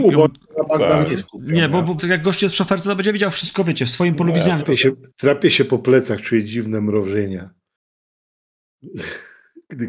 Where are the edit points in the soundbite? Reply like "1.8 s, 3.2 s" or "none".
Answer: 2.0 s, 4.6 s